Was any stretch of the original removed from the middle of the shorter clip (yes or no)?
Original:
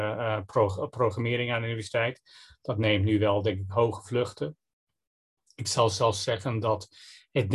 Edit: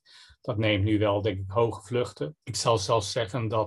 yes